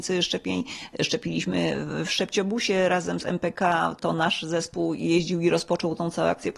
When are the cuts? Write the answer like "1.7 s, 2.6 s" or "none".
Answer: none